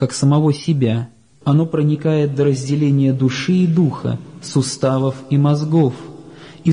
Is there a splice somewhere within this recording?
yes; 1 cut; at 1.4 s

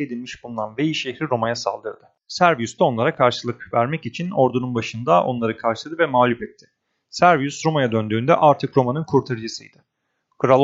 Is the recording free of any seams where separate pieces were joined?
yes; 0 cuts

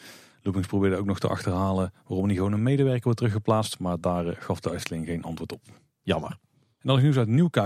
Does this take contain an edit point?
no; 0 cuts

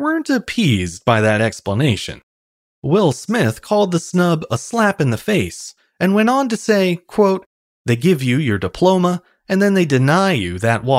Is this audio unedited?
no; 1 cut; at 7.7 s

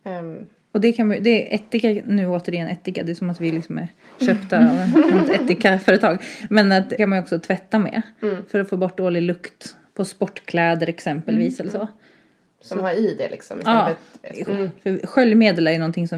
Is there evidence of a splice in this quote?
yes; 2 cuts; at 7.0 s, 14.5 s

